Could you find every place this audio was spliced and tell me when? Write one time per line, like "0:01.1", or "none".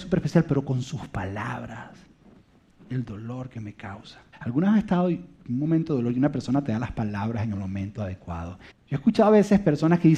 0:04.3
0:08.7